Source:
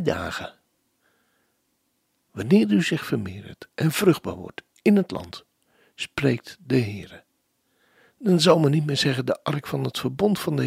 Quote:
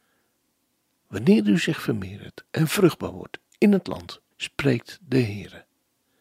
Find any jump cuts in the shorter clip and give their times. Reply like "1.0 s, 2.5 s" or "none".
4.3 s

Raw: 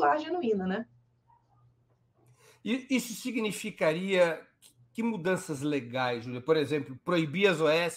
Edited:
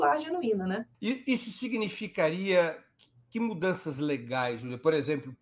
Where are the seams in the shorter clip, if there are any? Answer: 0.9 s

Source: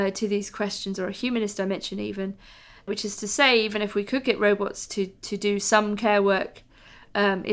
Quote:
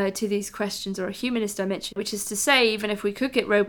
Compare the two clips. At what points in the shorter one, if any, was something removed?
1.9 s

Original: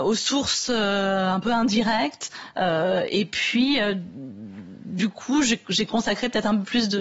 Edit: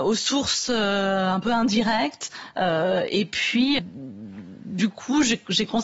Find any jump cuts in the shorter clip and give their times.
3.8 s

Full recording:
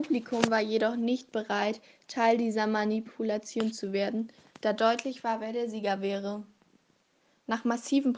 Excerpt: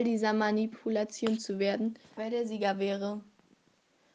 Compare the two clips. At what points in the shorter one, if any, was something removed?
2.2 s

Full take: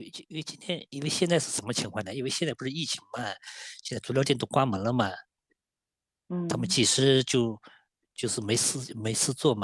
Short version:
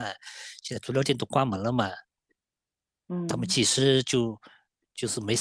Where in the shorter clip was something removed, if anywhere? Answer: none

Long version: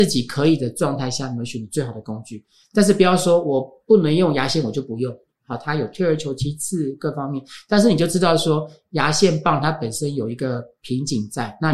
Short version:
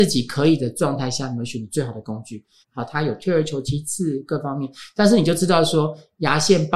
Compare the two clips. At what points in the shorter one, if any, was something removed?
2.6 s

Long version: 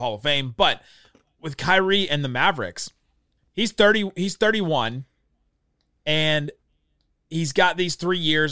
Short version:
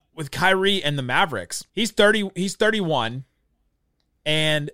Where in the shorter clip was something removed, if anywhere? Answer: 1.7 s

